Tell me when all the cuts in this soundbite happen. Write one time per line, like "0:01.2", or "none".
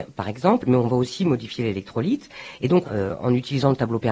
0:02.8